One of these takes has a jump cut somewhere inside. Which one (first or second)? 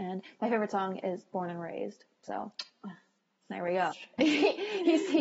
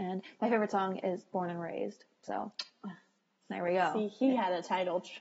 first